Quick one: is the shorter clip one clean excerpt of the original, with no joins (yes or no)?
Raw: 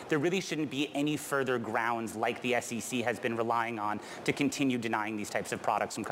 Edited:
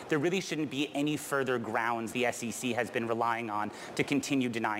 no